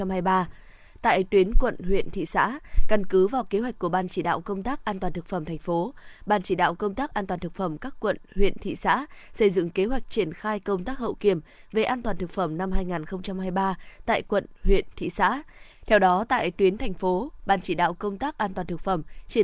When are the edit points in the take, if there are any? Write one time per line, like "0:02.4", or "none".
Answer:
0:15.7
0:17.4